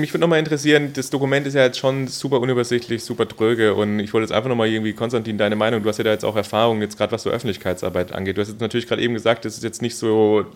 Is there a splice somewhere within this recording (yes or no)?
no